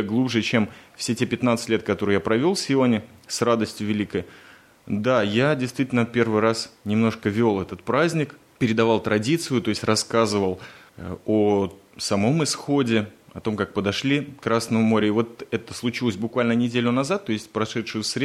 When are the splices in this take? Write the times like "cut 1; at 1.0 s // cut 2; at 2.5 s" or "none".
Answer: none